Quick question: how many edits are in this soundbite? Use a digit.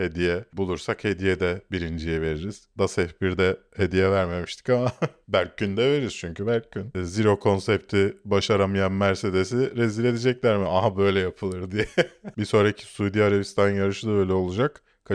2